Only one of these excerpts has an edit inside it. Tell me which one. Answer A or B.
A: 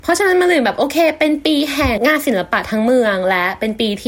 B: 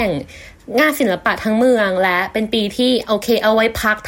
A